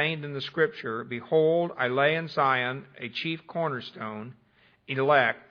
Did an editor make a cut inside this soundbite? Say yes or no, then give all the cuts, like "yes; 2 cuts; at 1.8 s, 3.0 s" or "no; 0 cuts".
no; 0 cuts